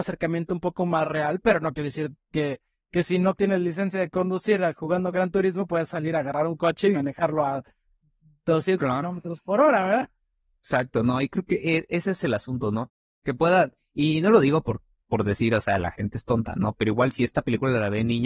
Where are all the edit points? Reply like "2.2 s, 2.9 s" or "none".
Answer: none